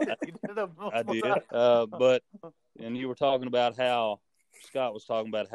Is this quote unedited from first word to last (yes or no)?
no